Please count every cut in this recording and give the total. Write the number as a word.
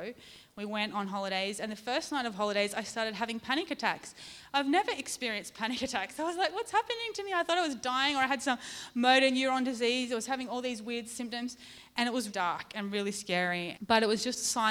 two